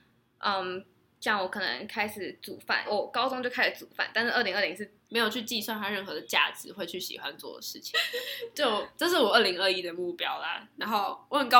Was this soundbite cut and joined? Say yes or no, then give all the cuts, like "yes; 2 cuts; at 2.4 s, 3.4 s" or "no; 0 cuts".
yes; 3 cuts; at 2.9 s, 5.1 s, 7.9 s